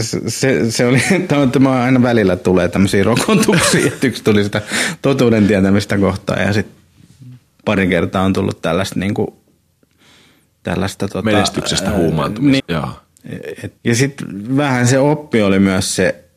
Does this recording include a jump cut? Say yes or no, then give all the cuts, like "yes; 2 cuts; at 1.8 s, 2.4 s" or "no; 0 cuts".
yes; 2 cuts; at 12.6 s, 13.8 s